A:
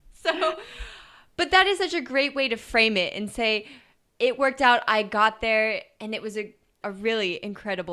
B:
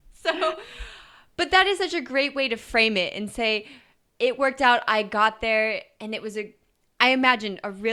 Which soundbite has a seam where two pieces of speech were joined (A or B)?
A